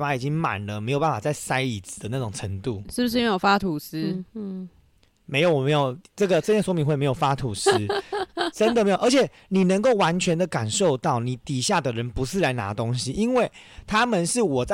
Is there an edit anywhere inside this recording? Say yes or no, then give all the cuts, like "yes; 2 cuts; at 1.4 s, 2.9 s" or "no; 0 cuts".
no; 0 cuts